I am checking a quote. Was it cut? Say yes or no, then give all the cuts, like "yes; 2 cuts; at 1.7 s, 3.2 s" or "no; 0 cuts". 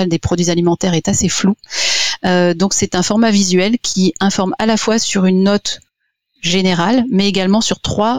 no; 0 cuts